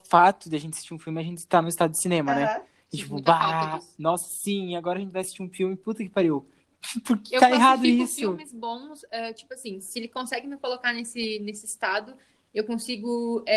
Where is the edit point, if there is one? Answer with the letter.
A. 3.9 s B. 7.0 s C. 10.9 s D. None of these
D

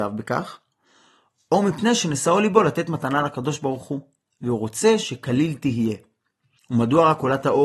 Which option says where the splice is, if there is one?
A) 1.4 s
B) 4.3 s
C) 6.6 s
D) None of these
C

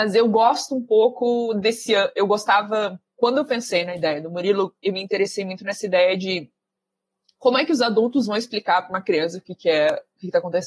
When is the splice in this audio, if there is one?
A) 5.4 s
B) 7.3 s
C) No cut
C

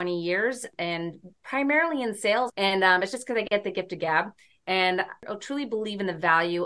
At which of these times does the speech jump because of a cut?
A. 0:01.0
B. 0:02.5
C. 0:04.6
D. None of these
B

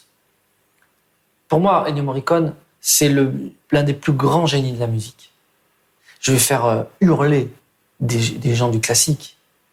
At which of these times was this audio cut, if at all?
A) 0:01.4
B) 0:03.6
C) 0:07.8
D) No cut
B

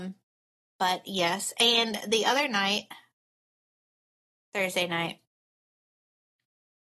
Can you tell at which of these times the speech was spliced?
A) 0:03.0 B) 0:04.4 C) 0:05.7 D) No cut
D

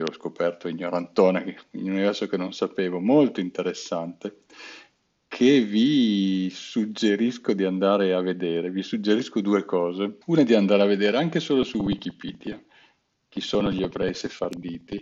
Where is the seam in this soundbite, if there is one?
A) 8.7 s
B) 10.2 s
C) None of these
B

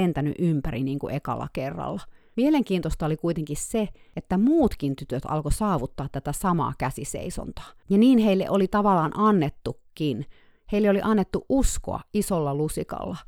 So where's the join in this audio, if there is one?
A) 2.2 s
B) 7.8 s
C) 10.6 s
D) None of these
B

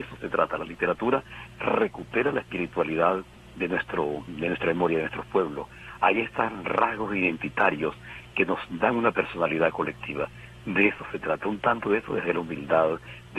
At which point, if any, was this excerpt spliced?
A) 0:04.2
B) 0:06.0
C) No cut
C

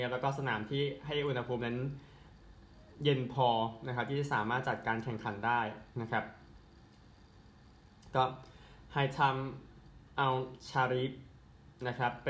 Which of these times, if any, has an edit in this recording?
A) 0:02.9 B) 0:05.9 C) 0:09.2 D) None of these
B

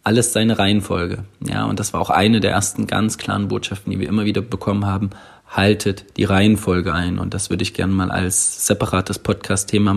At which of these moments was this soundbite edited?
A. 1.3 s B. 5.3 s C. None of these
C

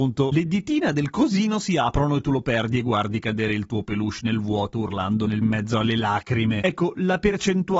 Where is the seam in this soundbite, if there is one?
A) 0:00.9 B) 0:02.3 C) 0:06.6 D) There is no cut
D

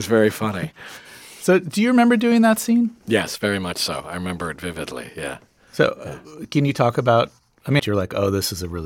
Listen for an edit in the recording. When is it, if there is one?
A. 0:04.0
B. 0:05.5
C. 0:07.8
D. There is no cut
C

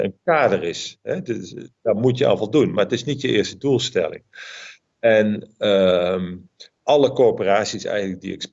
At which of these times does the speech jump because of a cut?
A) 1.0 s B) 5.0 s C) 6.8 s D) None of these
D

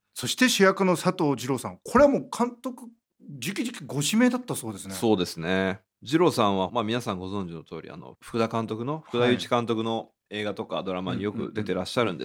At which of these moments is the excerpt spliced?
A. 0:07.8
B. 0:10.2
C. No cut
B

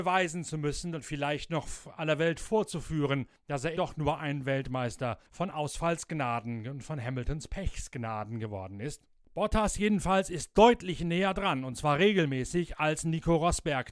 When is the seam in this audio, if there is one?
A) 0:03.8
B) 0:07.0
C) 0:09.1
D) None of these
A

